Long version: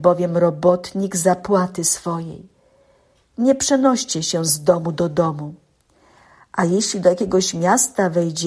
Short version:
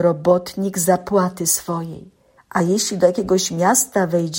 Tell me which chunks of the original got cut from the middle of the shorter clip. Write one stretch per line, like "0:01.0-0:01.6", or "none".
0:02.7-0:06.4